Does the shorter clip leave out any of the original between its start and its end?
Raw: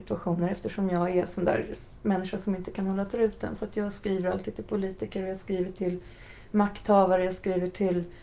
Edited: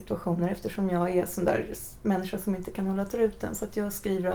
no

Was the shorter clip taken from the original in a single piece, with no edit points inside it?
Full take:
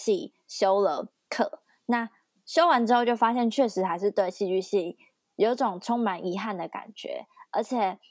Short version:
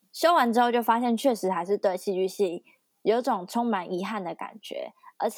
yes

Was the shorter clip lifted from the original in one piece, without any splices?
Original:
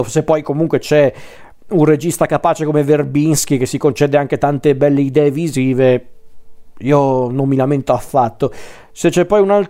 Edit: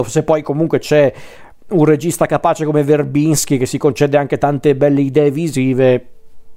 yes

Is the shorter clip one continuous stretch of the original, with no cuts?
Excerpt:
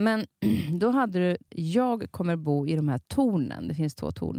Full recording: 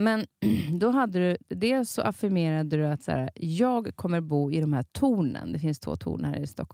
no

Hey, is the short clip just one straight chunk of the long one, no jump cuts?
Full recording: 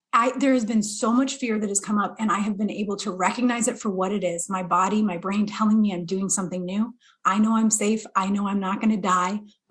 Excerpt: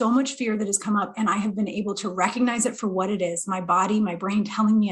yes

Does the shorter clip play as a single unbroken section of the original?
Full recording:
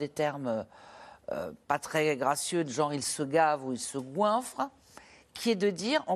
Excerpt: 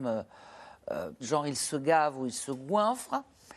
no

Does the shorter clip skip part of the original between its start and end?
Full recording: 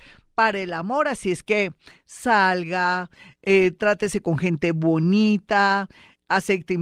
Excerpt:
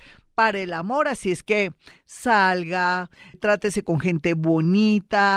yes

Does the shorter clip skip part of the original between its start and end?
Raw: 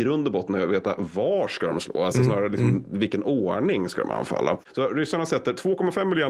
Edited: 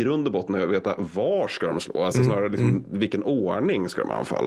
no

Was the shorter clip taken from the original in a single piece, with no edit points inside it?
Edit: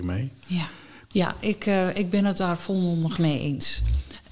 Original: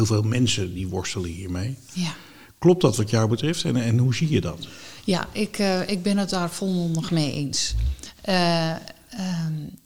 no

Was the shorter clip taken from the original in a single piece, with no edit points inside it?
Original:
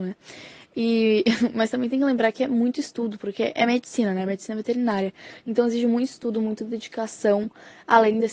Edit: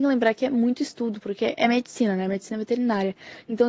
yes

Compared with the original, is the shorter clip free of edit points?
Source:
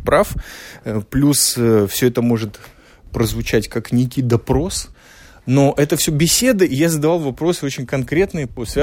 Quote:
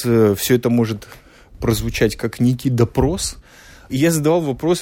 no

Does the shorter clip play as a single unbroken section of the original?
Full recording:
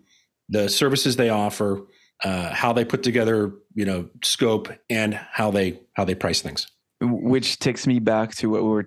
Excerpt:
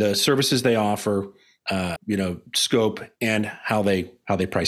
no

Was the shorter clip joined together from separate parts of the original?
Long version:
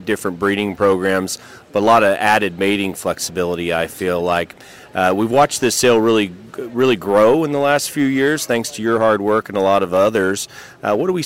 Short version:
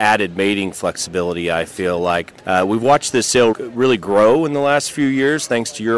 yes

